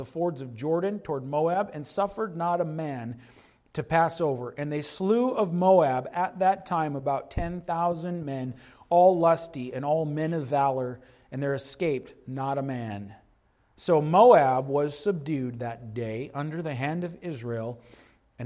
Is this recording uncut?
yes; 0 cuts

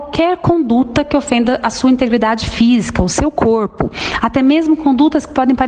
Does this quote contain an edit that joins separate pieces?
no; 0 cuts

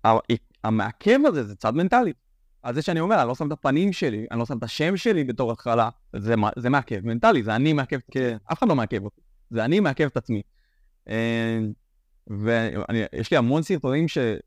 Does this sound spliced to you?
no; 0 cuts

